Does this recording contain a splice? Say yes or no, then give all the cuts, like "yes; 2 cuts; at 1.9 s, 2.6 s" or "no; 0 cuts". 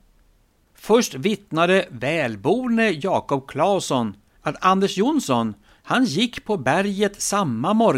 yes; 1 cut; at 5.7 s